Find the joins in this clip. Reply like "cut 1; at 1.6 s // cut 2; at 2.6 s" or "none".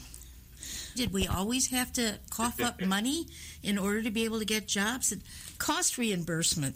cut 1; at 0.9 s // cut 2; at 5.6 s